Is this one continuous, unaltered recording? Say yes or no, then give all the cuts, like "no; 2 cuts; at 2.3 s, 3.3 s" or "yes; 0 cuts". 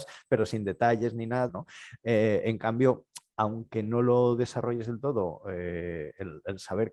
no; 1 cut; at 1.5 s